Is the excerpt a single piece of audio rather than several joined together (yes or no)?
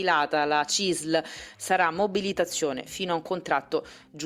no